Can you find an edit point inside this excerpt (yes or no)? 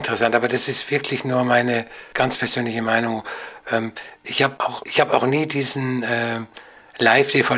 no